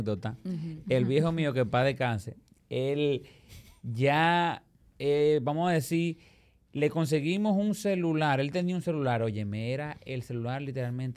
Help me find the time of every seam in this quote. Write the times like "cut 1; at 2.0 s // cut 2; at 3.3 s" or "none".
none

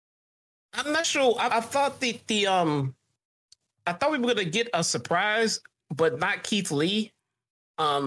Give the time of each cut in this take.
cut 1; at 1.5 s

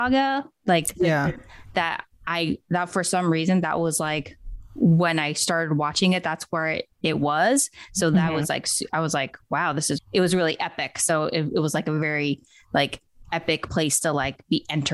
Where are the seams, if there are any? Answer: cut 1; at 10.0 s

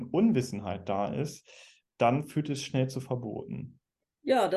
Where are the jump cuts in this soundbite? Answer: none

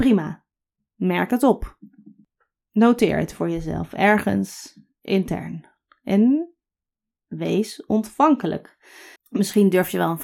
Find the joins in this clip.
cut 1; at 9.2 s

